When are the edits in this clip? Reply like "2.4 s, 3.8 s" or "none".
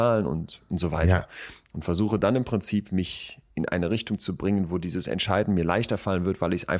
3.5 s